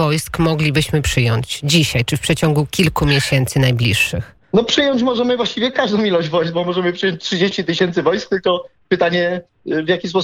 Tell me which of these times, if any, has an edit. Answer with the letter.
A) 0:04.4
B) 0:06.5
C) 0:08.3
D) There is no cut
A